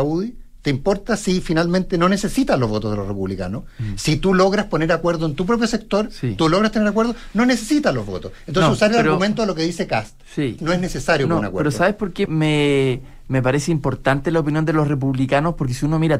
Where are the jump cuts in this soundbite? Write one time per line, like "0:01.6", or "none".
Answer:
0:10.6
0:12.3